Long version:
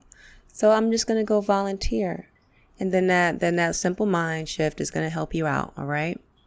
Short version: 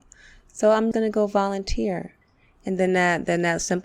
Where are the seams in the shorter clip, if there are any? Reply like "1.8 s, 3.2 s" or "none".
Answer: 0.9 s